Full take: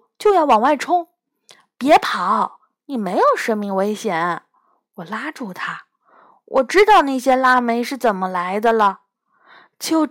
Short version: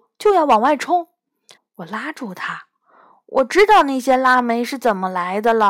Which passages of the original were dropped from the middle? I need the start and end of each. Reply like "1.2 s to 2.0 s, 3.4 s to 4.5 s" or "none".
1.6 s to 4.7 s